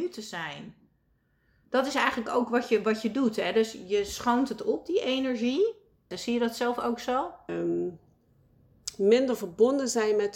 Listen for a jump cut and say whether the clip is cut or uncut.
cut